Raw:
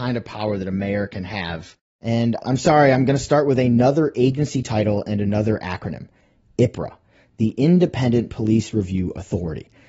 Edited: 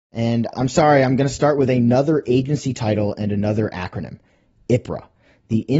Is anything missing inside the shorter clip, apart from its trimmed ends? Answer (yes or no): no